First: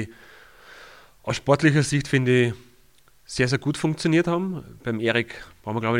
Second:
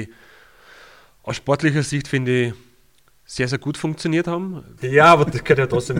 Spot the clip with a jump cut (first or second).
second